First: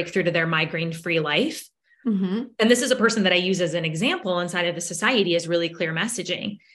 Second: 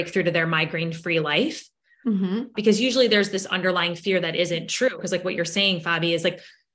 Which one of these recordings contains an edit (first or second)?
second